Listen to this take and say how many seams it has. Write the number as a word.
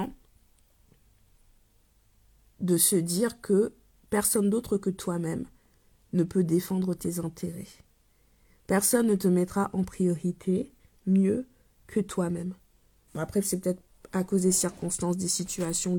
one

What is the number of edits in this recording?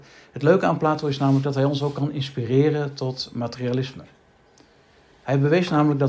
zero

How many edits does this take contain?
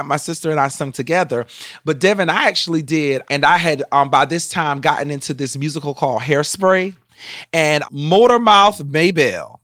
one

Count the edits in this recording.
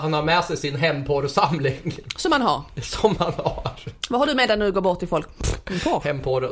zero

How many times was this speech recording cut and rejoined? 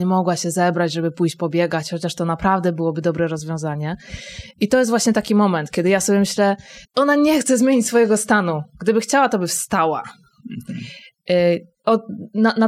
one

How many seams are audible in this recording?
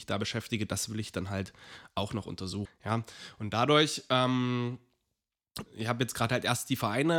two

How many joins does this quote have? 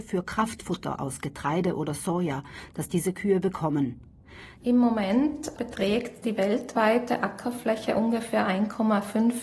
one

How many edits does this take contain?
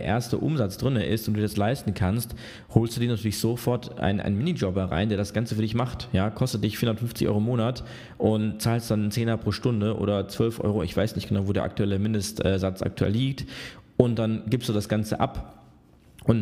zero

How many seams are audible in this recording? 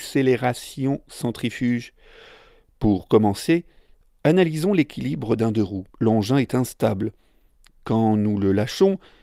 one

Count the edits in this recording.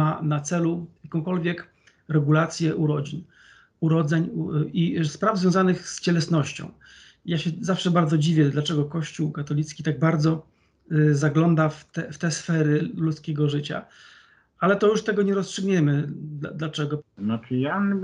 one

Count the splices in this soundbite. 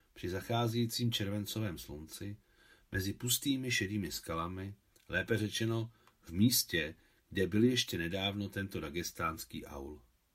one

